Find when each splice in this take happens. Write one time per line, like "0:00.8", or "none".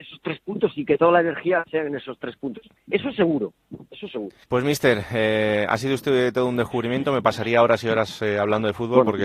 0:04.4